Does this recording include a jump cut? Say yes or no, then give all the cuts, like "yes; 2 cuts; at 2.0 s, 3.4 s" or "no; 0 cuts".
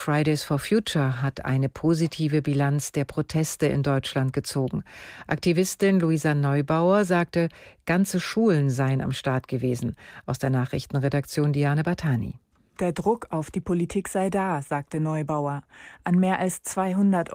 no; 0 cuts